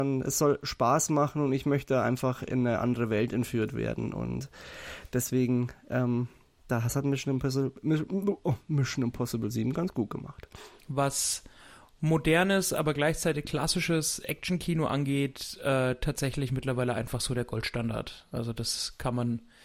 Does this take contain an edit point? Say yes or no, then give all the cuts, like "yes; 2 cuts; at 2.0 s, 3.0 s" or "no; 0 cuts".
yes; 1 cut; at 10.8 s